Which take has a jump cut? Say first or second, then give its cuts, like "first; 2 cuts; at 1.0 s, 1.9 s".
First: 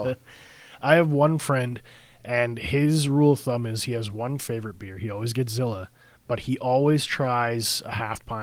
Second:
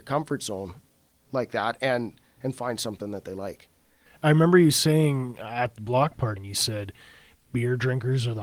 second; 2 cuts; at 4.1 s, 6.4 s